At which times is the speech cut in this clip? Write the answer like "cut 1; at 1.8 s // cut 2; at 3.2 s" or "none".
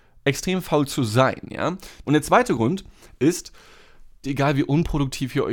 cut 1; at 2.0 s // cut 2; at 4.2 s